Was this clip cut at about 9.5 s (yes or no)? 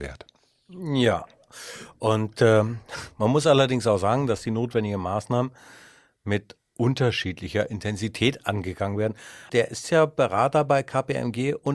yes